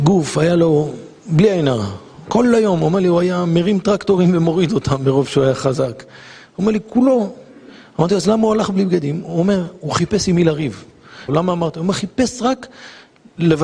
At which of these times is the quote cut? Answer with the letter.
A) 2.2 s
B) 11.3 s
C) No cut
B